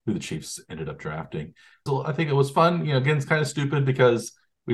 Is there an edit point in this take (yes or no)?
yes